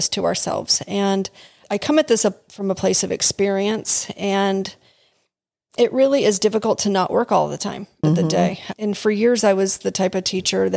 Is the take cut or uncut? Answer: cut